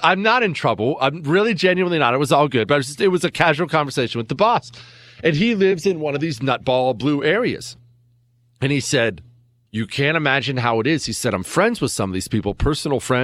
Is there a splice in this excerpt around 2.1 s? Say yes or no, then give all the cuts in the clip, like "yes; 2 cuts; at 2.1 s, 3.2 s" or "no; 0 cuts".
no; 1 cut; at 9.7 s